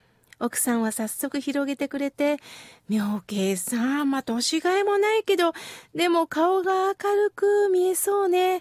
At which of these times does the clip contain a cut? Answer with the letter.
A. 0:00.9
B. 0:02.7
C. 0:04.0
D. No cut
D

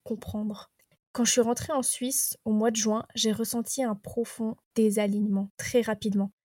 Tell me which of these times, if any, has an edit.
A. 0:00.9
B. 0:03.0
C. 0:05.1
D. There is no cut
A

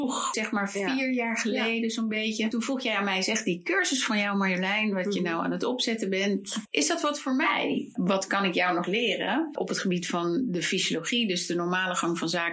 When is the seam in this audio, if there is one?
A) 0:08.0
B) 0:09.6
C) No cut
A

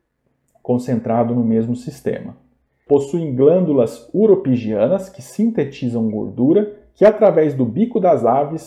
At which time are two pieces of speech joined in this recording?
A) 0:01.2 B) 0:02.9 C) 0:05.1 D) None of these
B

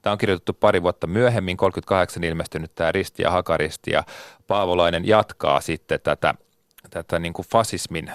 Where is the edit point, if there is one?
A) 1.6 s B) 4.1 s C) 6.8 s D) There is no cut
D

